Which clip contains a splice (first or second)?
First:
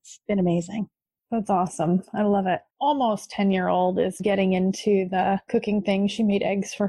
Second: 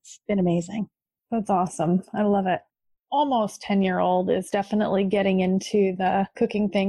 first